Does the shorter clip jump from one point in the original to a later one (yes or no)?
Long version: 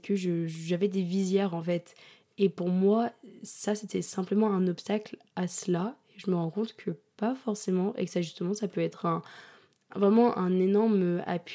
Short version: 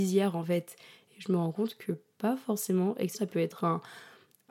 yes